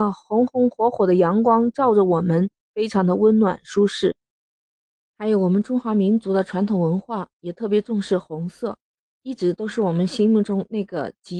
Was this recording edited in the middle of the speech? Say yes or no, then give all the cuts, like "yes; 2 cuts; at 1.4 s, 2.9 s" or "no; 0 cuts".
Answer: no; 0 cuts